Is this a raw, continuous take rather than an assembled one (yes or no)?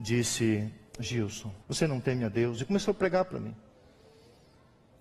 no